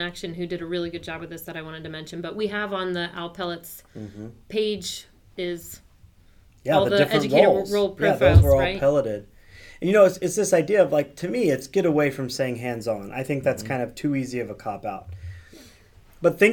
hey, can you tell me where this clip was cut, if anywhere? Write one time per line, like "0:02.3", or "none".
none